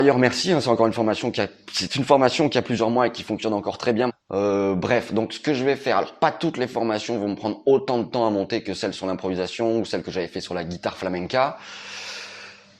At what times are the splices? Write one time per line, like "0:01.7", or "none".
0:04.1